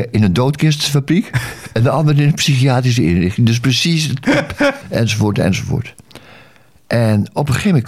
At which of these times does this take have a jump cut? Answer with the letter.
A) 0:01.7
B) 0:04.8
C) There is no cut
B